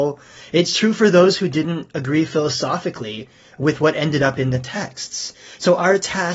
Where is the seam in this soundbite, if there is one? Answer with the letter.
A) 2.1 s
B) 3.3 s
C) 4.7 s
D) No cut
D